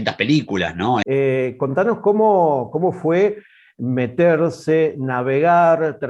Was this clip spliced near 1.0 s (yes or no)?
yes